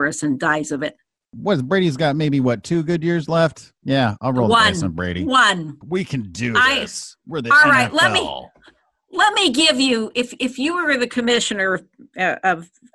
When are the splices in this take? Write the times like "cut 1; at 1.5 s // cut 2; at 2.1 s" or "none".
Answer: cut 1; at 5.8 s